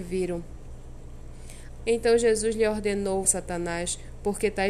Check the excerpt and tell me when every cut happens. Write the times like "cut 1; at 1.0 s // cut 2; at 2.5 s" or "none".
cut 1; at 1.8 s // cut 2; at 3.2 s